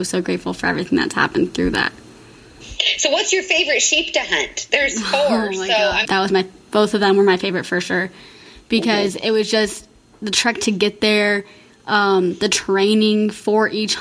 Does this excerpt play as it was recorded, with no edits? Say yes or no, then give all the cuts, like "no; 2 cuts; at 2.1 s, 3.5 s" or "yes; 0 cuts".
no; 1 cut; at 6.1 s